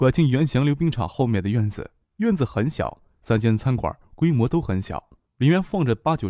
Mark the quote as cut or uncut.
cut